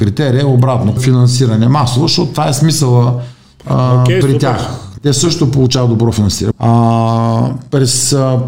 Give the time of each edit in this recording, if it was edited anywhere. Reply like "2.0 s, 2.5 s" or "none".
1.0 s, 5.0 s, 6.5 s